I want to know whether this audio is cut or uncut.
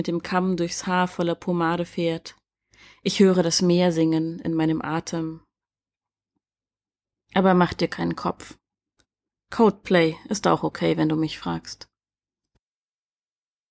uncut